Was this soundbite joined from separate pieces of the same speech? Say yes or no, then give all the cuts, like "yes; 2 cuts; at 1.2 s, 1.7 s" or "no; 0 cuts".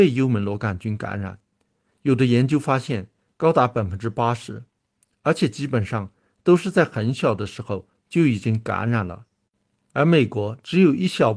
no; 0 cuts